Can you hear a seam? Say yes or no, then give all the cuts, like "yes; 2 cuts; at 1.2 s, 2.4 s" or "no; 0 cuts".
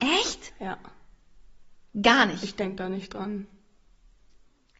no; 0 cuts